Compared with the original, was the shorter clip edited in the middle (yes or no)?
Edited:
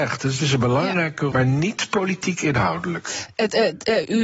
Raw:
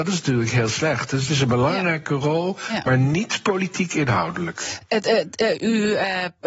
yes